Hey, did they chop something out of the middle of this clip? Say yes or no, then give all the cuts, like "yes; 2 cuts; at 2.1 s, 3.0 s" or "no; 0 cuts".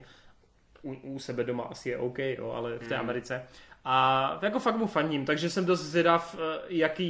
no; 0 cuts